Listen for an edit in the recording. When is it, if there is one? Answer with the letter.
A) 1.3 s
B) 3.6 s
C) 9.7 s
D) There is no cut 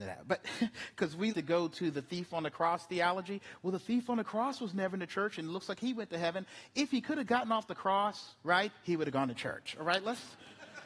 A